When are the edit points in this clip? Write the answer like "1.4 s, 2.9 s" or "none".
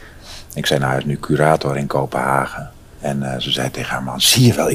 none